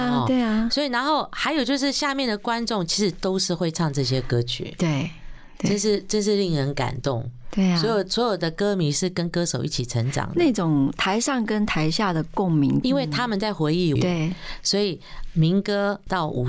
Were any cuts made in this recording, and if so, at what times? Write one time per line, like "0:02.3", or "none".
0:12.8
0:14.0